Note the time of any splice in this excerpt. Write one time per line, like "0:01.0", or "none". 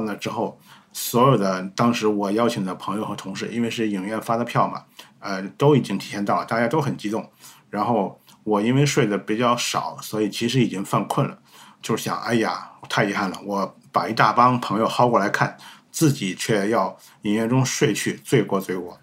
none